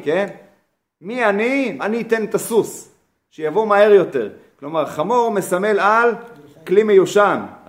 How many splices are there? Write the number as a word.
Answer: one